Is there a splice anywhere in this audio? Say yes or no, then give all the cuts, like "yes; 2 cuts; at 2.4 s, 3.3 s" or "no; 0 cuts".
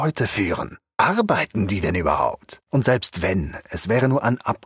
yes; 1 cut; at 2.6 s